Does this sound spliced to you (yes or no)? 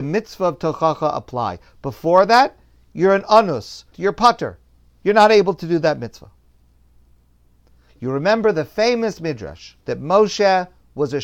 yes